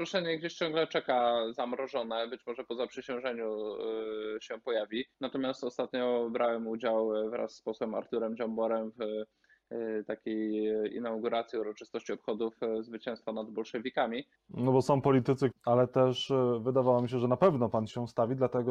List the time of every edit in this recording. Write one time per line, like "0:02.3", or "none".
0:05.1
0:14.4
0:15.5